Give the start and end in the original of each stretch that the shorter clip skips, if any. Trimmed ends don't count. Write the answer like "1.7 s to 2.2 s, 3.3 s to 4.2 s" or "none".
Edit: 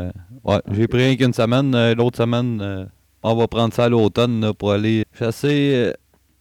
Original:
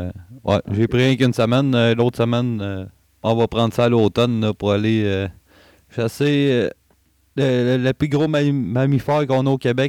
5.0 s to 5.8 s